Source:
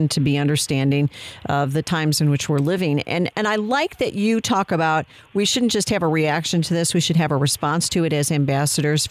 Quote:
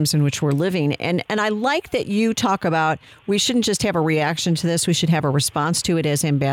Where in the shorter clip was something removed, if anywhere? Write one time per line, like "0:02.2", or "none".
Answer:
none